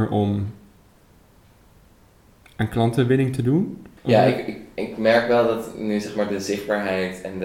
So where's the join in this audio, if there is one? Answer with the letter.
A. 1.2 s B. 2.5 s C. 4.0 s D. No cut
C